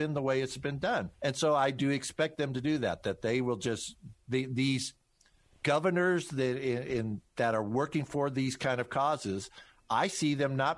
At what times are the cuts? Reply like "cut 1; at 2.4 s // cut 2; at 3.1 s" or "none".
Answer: cut 1; at 1.1 s